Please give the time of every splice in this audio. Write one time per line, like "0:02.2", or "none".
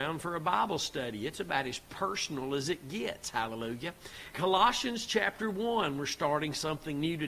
0:04.3